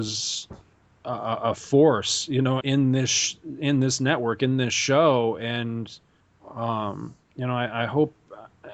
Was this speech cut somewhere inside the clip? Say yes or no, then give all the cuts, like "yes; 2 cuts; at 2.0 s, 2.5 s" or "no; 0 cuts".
yes; 1 cut; at 2.6 s